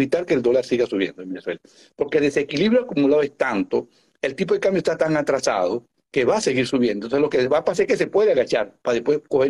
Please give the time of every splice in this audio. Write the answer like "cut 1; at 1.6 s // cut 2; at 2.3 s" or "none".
none